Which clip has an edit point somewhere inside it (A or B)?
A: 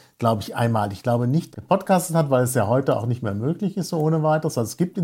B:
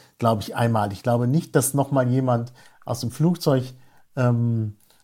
A